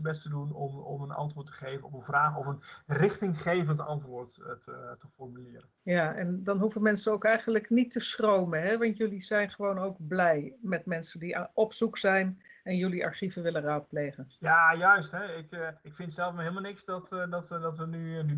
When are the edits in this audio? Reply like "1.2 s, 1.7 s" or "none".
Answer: 5.8 s